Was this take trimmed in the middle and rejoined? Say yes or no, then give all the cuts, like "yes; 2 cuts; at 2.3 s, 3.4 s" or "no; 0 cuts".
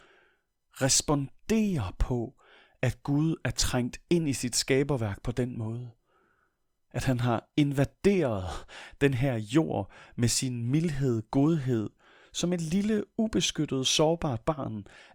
no; 0 cuts